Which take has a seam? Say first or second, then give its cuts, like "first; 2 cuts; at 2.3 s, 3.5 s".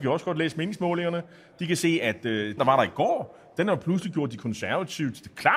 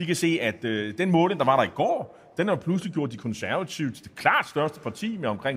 first; 1 cut; at 2.6 s